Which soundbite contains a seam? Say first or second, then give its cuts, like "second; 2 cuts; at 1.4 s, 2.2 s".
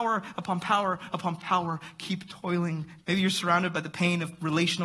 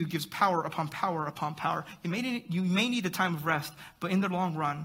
first; 1 cut; at 3.0 s